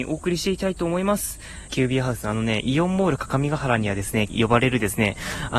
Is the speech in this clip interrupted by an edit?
yes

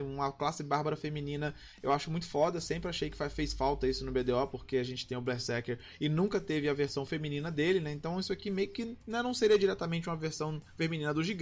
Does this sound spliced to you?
no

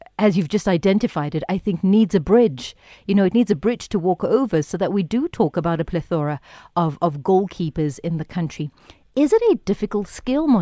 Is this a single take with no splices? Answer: yes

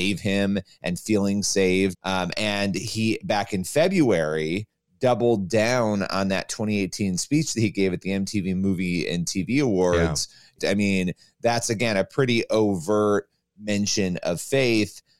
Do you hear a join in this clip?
yes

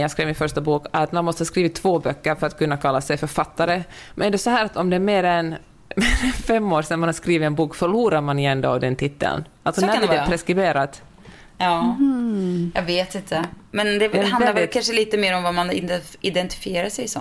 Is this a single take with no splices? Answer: yes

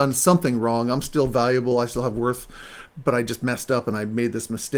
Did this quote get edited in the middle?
no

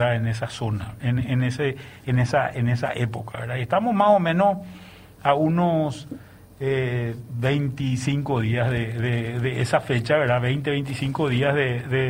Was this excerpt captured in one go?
yes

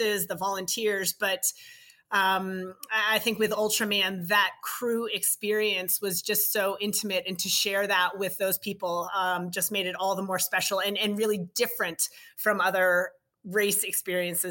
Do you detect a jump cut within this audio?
no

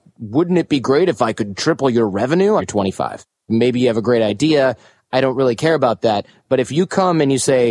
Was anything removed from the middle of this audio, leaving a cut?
yes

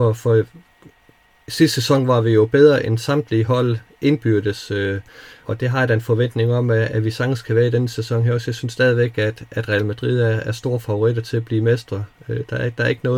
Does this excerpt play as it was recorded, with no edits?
no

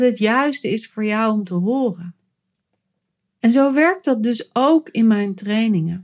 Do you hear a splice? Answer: no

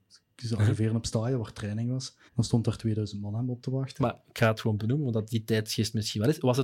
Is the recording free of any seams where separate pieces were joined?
no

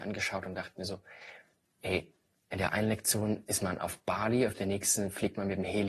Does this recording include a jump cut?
yes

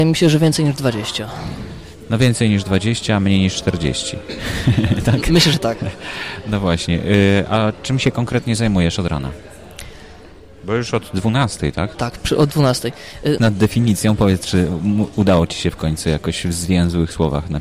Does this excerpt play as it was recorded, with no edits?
no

